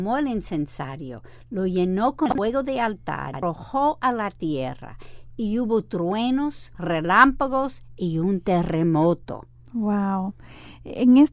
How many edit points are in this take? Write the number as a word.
one